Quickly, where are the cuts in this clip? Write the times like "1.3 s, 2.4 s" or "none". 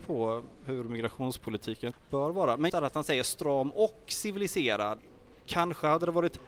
2.7 s